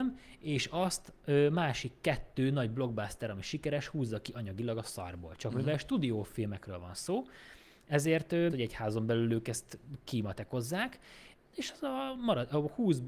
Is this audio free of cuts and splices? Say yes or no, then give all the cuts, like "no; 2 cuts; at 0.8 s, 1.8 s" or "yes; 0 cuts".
no; 1 cut; at 8.5 s